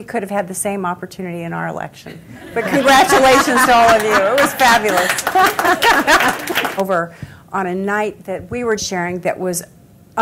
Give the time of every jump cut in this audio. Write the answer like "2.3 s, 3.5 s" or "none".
6.8 s, 8.8 s